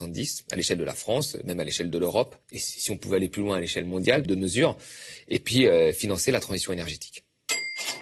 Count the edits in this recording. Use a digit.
2